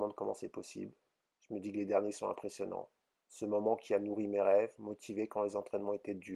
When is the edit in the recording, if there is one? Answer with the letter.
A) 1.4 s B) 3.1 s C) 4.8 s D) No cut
B